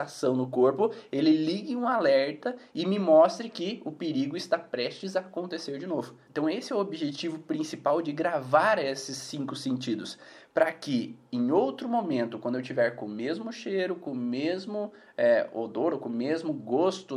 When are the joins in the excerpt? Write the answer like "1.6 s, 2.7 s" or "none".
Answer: 6.2 s